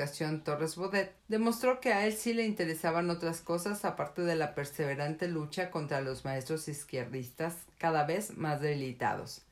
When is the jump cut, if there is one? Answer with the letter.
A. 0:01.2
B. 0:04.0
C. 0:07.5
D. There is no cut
A